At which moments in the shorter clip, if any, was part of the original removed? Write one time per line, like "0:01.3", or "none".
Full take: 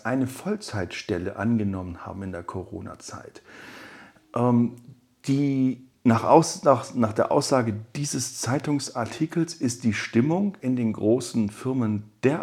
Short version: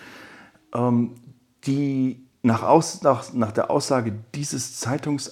none